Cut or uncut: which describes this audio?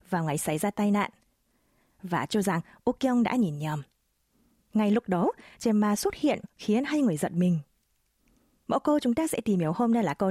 uncut